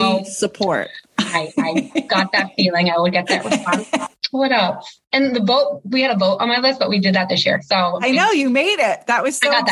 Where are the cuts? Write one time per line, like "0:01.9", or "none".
none